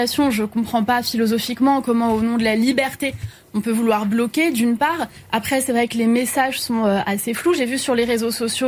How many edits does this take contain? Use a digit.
0